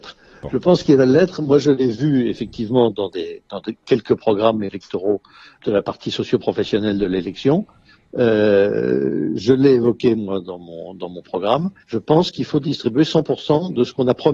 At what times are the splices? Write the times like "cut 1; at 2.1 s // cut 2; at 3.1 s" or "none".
cut 1; at 5.6 s // cut 2; at 11.8 s